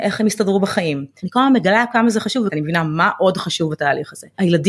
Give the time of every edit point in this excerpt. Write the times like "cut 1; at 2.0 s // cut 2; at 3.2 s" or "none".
cut 1; at 1.2 s // cut 2; at 2.5 s

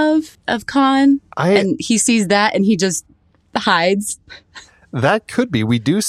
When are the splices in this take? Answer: none

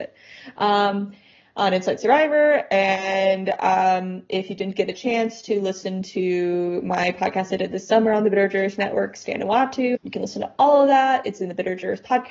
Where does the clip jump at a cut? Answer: cut 1; at 9.9 s

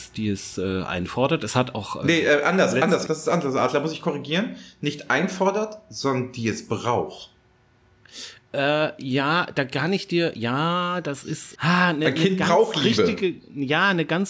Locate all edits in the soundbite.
cut 1; at 3.1 s // cut 2; at 11.6 s

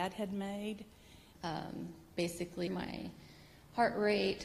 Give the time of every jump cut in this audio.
cut 1; at 1.4 s // cut 2; at 2.7 s

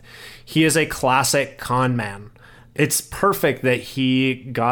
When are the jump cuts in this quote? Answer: cut 1; at 2.7 s

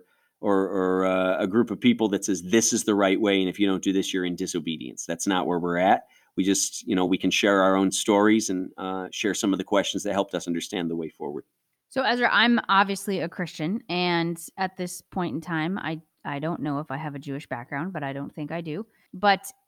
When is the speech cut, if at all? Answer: none

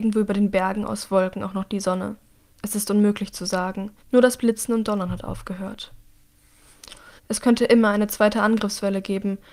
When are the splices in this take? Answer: cut 1; at 4.0 s // cut 2; at 7.2 s

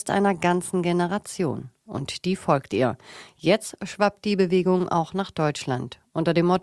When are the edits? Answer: none

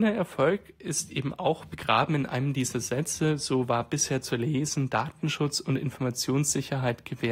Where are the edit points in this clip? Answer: none

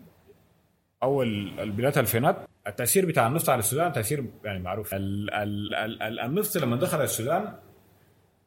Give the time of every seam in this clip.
cut 1; at 5.7 s

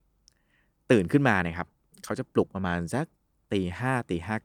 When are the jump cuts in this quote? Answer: none

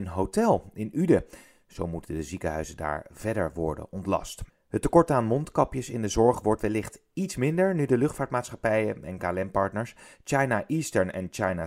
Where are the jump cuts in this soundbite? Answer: cut 1; at 4.5 s

